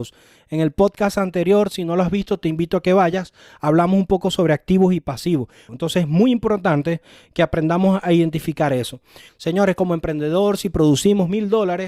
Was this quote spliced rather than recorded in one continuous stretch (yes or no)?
yes